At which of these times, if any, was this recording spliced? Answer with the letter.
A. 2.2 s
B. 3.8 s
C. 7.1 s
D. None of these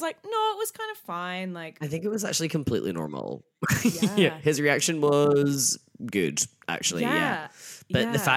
D